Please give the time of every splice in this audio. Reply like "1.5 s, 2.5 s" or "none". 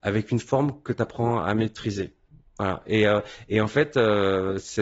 none